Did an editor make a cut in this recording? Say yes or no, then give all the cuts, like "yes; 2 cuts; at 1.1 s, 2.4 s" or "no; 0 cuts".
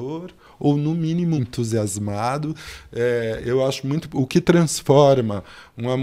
yes; 1 cut; at 1.4 s